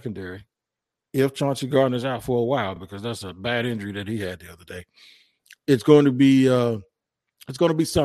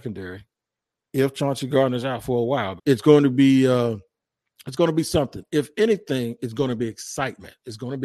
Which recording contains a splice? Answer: second; 1 cut; at 2.8 s

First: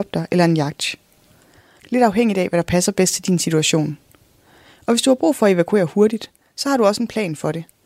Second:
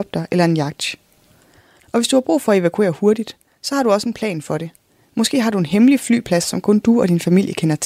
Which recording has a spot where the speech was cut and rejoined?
second; 1 cut; at 1.8 s

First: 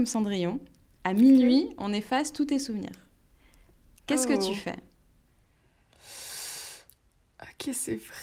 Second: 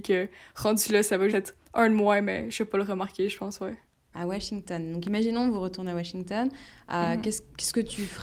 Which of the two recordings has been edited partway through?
second; 2 cuts; at 1.3 s, 4.1 s

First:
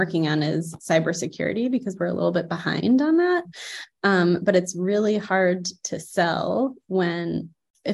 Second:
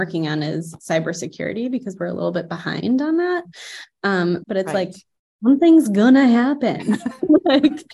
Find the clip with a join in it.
second; 1 cut; at 4.4 s

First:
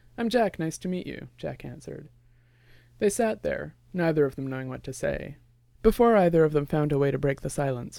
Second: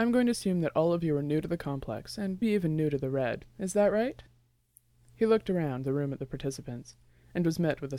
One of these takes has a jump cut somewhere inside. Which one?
second; 1 cut; at 2.4 s

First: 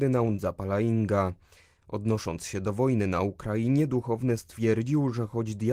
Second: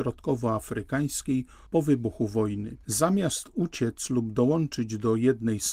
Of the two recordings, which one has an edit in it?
second; 1 cut; at 2.8 s

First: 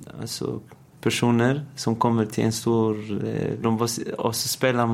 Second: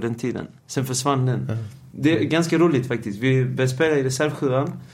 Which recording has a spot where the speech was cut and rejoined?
first; 2 cuts; at 0.9 s, 3.6 s

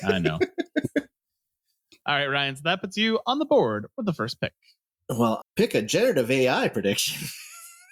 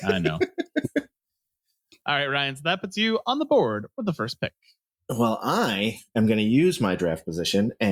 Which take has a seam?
first; 1 cut; at 5.4 s

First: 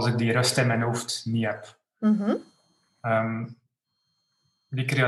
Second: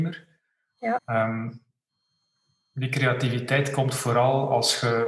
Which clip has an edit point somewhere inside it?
second; 1 cut; at 1.0 s

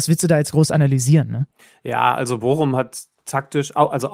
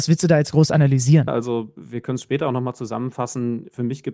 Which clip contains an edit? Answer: second; 1 cut; at 1.3 s

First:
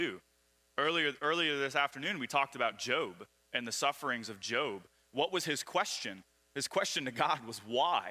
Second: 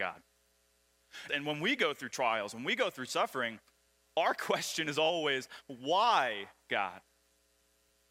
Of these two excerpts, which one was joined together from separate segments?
second; 1 cut; at 1.3 s

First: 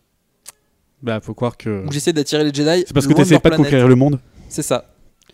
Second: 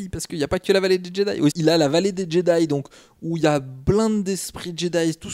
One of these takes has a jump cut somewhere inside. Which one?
second; 1 cut; at 1.5 s

